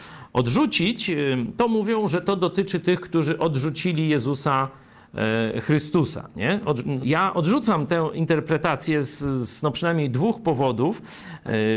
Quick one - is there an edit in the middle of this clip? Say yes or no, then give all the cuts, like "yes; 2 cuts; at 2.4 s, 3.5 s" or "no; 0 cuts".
yes; 1 cut; at 7.0 s